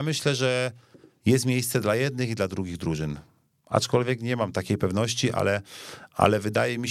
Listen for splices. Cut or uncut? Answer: uncut